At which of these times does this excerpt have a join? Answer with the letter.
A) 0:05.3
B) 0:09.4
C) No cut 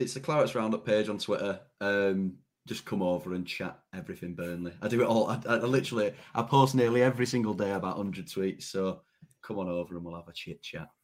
B